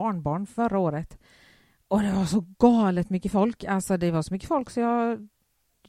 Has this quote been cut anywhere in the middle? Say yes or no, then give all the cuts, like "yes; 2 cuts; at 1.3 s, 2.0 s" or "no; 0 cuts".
no; 0 cuts